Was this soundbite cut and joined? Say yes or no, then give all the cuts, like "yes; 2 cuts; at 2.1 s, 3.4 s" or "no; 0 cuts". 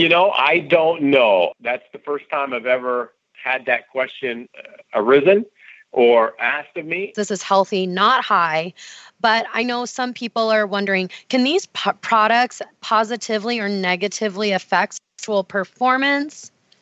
yes; 1 cut; at 7.1 s